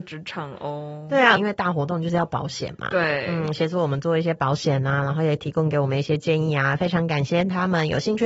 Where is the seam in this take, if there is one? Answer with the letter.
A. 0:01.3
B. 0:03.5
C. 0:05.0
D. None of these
A